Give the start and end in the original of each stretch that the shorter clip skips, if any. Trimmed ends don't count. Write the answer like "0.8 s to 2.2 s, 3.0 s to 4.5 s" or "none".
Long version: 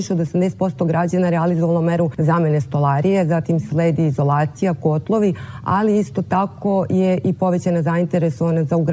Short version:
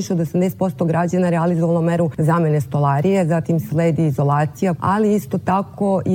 4.8 s to 5.6 s

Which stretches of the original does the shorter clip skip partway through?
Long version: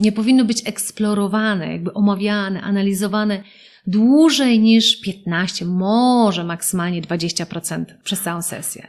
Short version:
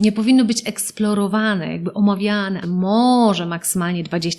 2.6 s to 5.6 s

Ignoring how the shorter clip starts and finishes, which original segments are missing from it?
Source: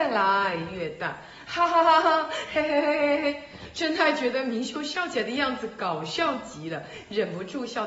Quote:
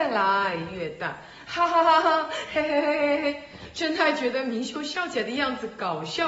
none

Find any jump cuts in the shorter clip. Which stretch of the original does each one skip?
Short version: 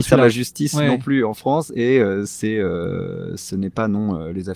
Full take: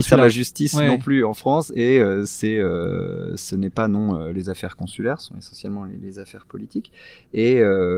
none

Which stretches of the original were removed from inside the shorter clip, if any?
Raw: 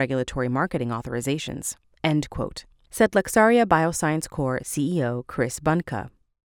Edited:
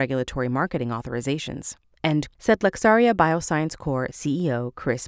2.3 s to 2.8 s

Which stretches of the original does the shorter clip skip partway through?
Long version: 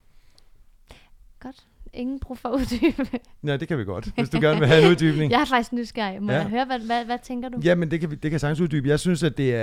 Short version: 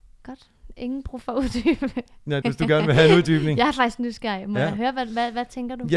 3.6 s to 4.1 s

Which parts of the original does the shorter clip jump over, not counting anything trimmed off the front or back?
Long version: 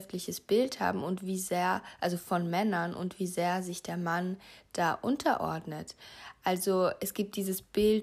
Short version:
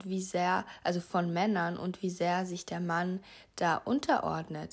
none

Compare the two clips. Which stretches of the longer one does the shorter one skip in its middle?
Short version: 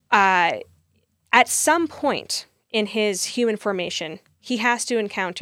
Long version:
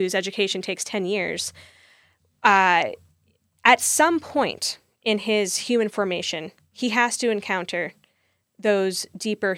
none

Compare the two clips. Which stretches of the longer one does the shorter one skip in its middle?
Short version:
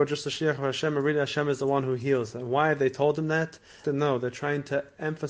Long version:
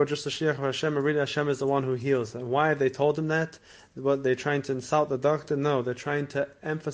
3.8 s to 5.5 s

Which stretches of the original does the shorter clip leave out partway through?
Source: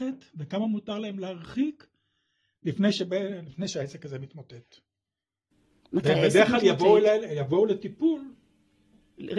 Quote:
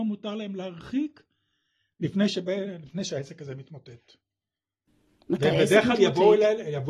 none

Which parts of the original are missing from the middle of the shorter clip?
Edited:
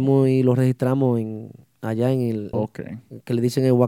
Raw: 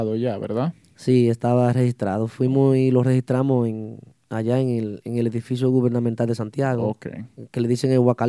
5.0 s to 6.8 s

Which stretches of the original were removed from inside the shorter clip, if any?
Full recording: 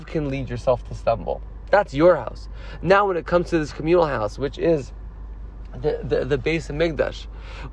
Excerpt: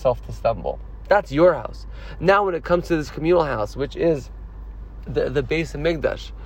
5.7 s to 6.0 s

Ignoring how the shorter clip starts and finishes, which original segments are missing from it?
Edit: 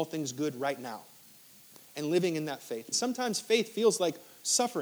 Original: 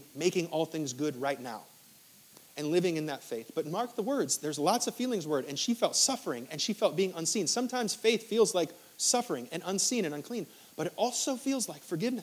3.5 s to 7.5 s

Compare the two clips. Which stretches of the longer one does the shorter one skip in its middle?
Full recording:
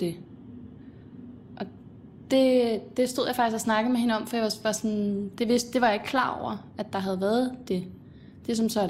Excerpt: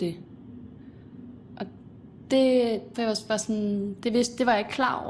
2.9 s to 4.3 s

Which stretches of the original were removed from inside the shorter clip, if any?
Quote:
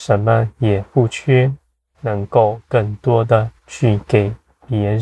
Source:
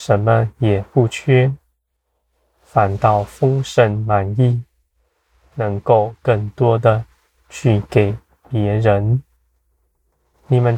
1.9 s to 5.5 s, 7.1 s to 7.4 s

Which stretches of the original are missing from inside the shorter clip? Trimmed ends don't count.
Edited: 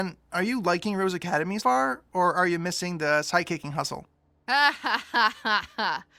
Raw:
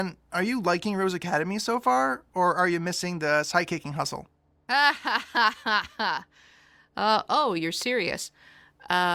1.6 s to 1.8 s

